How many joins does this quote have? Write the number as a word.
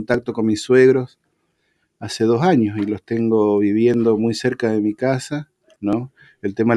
one